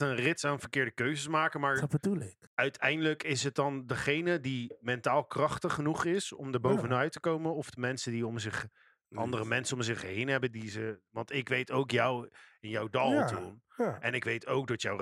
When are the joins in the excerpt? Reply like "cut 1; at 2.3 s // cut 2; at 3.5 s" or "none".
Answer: cut 1; at 2.5 s